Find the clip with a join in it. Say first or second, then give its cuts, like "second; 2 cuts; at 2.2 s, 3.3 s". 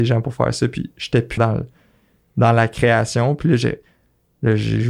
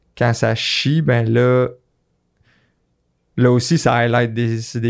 first; 1 cut; at 1.4 s